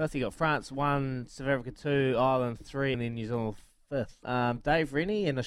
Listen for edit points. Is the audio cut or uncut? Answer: cut